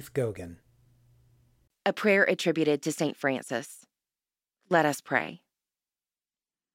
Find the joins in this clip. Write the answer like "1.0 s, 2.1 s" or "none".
none